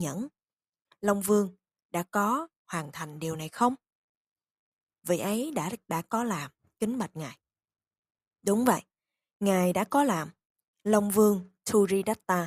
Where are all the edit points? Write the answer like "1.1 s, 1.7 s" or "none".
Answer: none

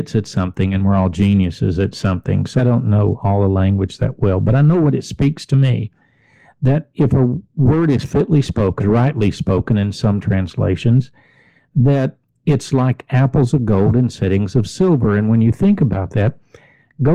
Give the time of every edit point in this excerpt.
2.6 s, 8.8 s

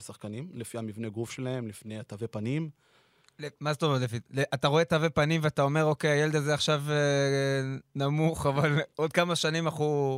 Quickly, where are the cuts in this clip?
none

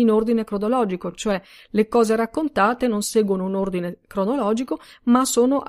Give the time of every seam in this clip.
none

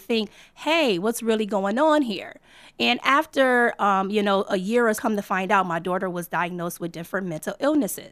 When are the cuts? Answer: 4.9 s

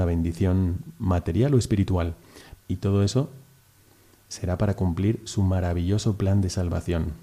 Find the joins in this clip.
2.6 s

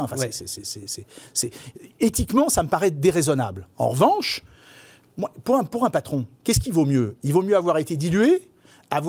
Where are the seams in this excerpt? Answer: none

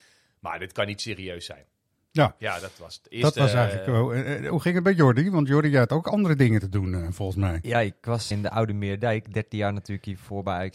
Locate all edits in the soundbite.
8.3 s

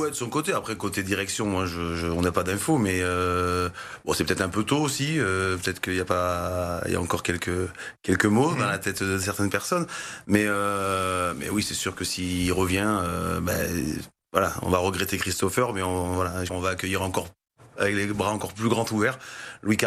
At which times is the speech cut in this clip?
16.5 s

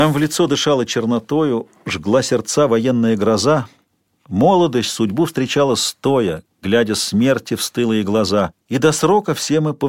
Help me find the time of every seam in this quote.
8.6 s

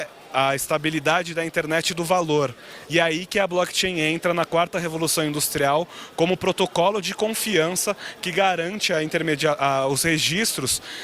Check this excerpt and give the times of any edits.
2.9 s

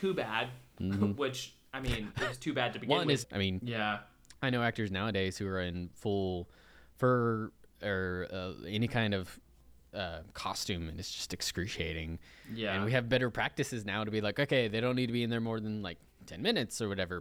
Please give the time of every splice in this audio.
3.2 s

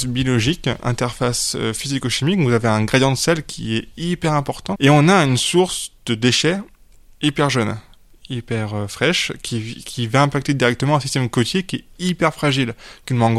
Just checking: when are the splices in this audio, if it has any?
4.7 s

